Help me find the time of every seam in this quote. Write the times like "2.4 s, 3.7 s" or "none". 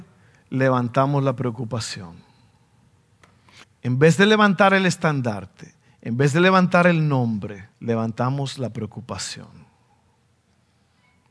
3.6 s, 7.7 s